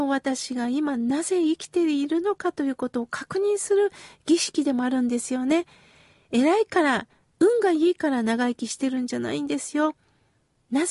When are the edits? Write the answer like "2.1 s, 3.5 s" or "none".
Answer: none

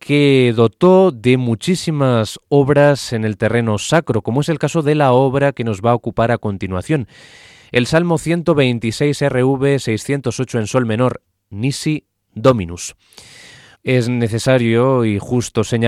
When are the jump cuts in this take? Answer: 13.7 s

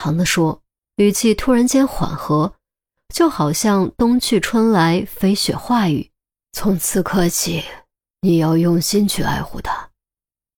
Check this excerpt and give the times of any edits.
6.4 s, 8.0 s

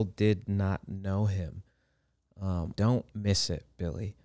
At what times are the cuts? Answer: 2.7 s

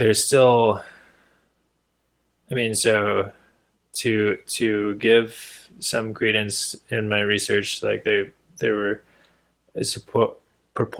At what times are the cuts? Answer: none

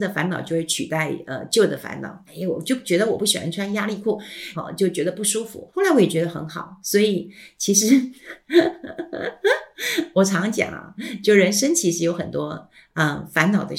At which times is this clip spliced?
2.3 s, 4.5 s, 5.7 s

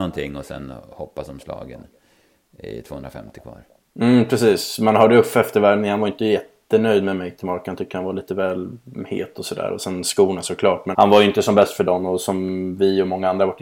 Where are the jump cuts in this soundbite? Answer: 10.9 s

